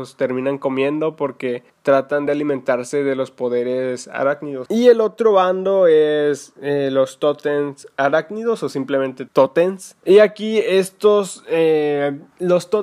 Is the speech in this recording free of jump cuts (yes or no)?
no